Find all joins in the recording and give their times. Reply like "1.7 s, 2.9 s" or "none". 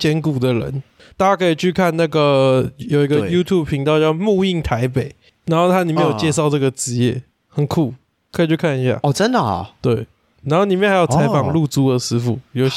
1.1 s